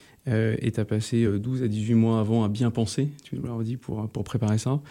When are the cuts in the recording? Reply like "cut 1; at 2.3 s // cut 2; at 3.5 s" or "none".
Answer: none